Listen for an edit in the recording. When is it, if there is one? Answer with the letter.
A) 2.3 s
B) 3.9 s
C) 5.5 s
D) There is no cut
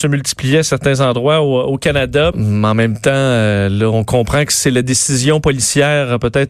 A